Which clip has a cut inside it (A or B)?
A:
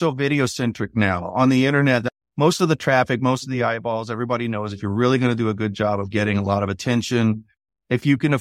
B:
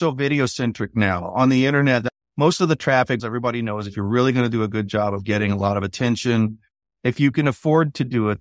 B